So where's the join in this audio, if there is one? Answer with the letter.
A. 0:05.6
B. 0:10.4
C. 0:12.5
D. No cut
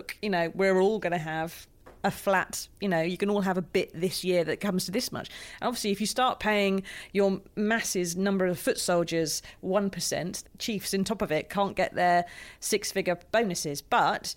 B